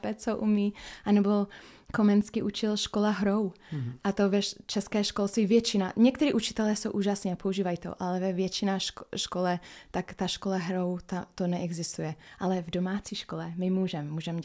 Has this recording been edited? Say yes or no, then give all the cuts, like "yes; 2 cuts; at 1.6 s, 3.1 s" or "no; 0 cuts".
no; 0 cuts